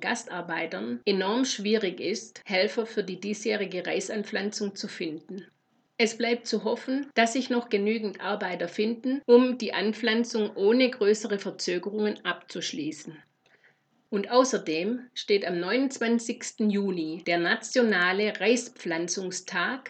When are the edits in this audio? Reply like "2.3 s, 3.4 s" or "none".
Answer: none